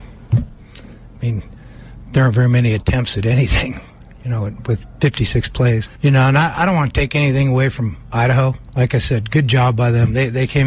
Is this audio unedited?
yes; 0 cuts

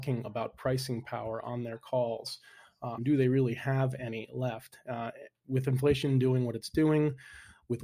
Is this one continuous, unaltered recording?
no; 1 cut; at 3.0 s

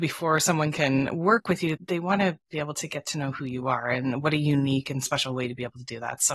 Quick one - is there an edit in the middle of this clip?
no; 0 cuts

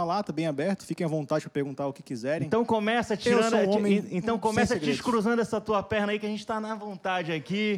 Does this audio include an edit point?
no; 0 cuts

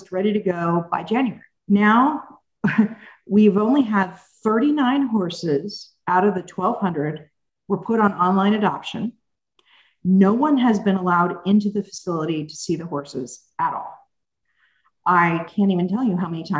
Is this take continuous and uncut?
yes; 0 cuts

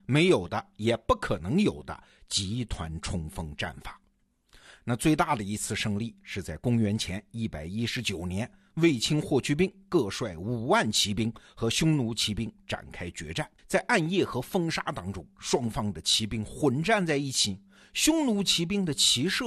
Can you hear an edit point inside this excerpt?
yes; 1 cut; at 13.6 s

